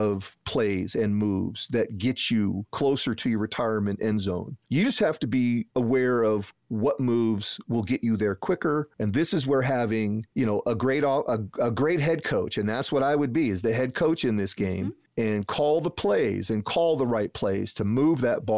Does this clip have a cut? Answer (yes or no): no